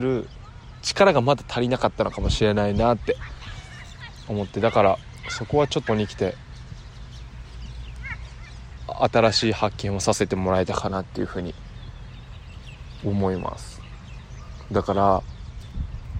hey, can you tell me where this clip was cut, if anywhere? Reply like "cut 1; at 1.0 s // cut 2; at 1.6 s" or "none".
cut 1; at 5.9 s